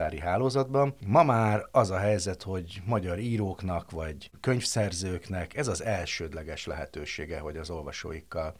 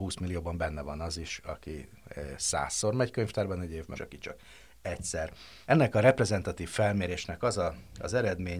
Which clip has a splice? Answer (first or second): second